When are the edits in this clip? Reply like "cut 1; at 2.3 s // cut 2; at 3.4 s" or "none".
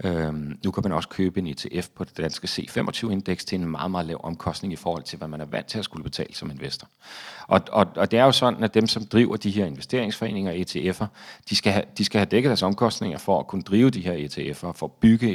none